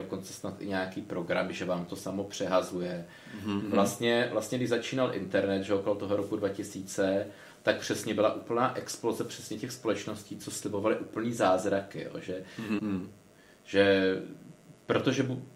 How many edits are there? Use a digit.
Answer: 2